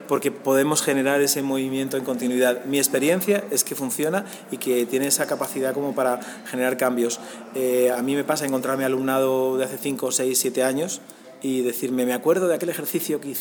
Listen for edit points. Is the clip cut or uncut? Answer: uncut